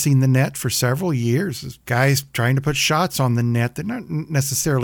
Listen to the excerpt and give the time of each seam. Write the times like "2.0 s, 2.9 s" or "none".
1.8 s